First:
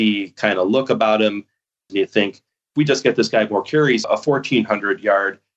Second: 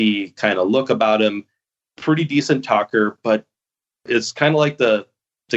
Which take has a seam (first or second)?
first